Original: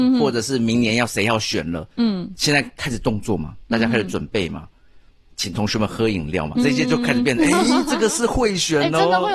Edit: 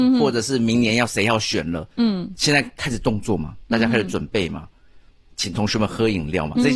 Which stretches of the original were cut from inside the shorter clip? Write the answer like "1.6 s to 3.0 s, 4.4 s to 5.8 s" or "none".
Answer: none